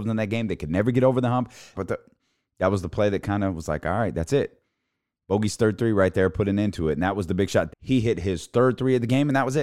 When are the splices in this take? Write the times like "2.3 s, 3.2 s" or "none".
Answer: 1.7 s, 7.7 s